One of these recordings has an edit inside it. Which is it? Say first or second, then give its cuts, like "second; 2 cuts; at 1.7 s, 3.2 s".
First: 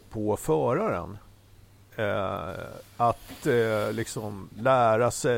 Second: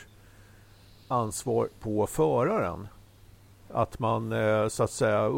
second; 1 cut; at 3.6 s